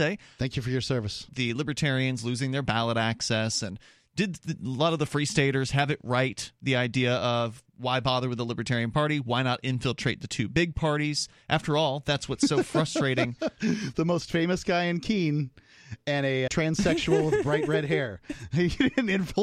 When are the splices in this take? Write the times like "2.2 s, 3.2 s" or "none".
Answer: 1.3 s, 16.5 s

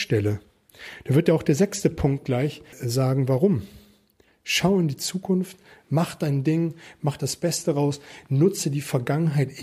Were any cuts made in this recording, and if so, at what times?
2.7 s, 4.3 s

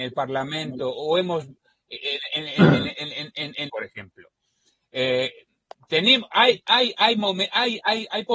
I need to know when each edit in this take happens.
3.7 s

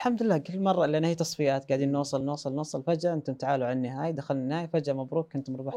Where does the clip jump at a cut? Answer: none

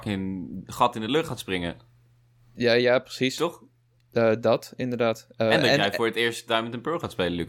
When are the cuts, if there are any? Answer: none

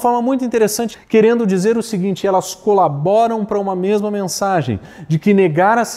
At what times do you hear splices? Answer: 0.9 s

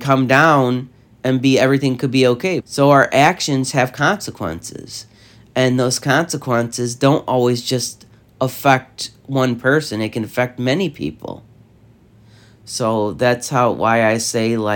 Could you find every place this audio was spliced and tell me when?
2.6 s

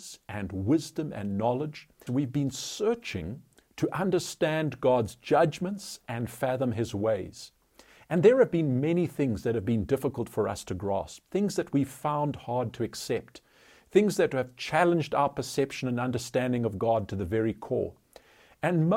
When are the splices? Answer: 2.1 s

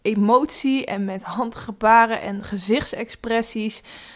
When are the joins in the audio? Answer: none

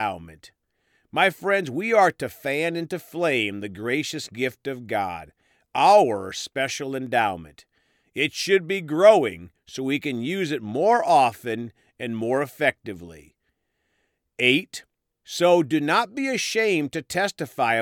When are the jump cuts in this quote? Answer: none

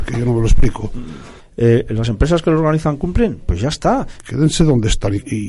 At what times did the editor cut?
1.4 s, 4.2 s

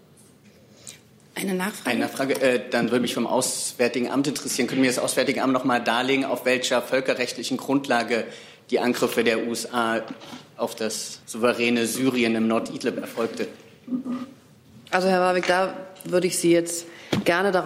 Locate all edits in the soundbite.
11.2 s

